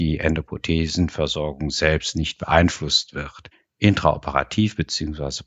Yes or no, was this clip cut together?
no